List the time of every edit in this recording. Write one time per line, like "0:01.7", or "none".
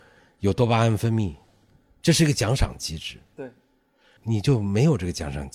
0:04.2